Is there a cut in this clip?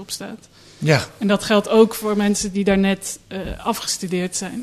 no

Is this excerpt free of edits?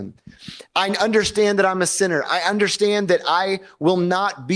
yes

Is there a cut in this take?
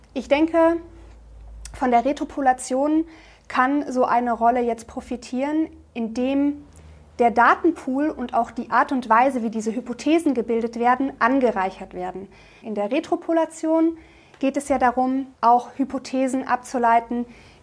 yes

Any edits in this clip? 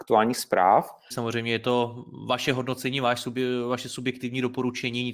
yes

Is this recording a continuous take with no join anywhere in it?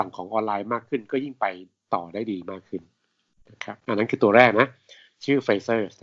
yes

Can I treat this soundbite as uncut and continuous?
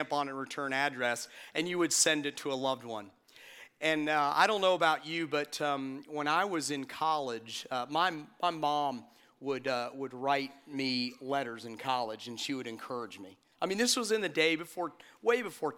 yes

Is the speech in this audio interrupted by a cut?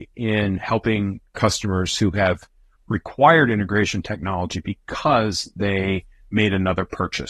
yes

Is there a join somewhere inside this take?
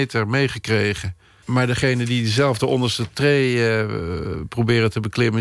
yes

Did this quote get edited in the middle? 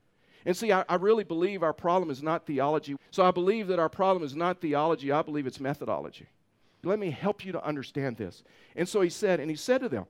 yes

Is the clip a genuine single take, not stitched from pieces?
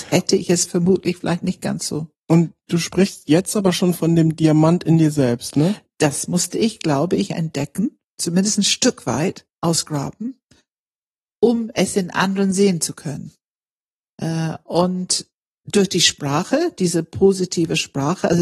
yes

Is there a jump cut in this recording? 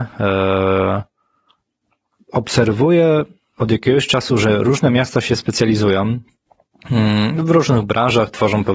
no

